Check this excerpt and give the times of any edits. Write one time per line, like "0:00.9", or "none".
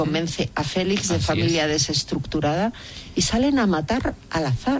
none